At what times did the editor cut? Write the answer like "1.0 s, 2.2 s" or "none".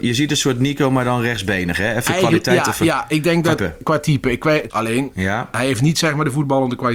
3.6 s, 4.7 s